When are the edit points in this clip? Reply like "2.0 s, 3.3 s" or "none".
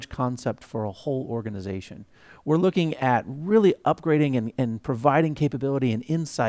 none